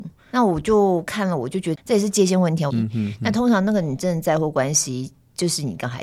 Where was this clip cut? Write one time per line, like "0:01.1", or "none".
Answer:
0:02.7